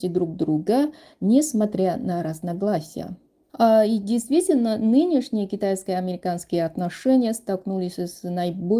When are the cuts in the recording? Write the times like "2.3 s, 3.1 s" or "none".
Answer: 3.4 s